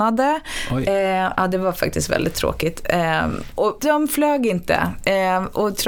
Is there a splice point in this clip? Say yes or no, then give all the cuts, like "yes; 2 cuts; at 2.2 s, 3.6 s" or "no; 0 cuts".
yes; 1 cut; at 3.8 s